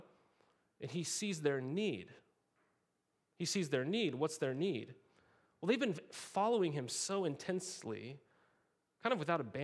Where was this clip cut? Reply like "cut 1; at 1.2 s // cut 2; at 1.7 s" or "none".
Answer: none